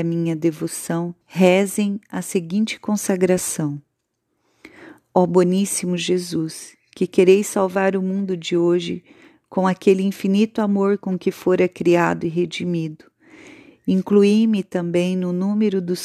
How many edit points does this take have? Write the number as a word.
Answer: one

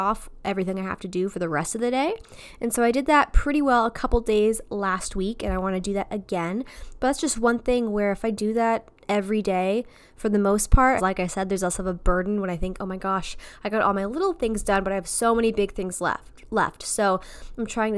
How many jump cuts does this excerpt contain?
one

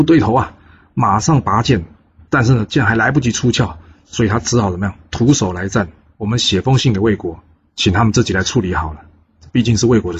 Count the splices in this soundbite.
one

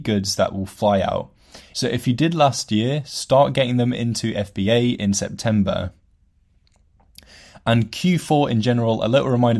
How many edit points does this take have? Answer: one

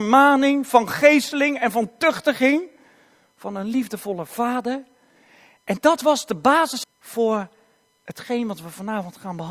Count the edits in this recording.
one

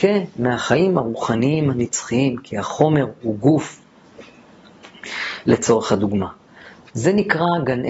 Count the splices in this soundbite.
two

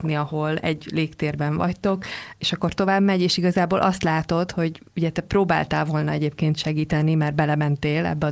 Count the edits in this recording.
zero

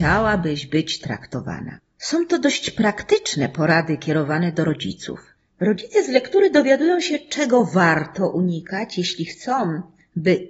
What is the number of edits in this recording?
one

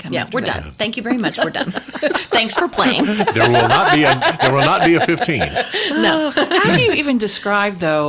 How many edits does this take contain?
zero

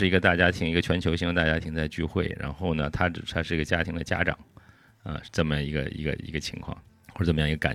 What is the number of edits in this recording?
zero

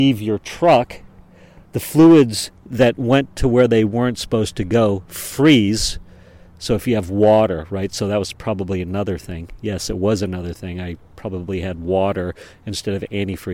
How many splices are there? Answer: zero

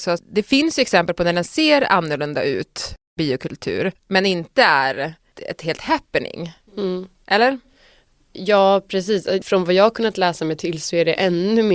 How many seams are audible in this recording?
zero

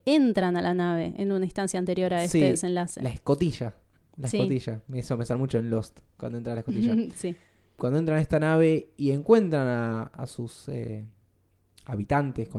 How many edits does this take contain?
zero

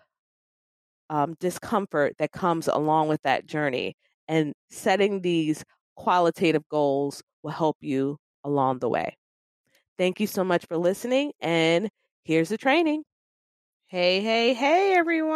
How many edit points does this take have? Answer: zero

